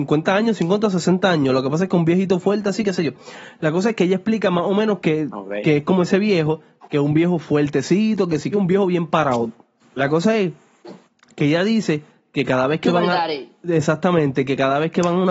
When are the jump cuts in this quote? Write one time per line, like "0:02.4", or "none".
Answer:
0:08.5
0:09.8